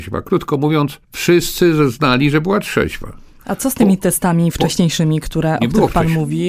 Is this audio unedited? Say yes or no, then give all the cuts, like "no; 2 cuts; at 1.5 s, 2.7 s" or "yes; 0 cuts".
no; 1 cut; at 1.0 s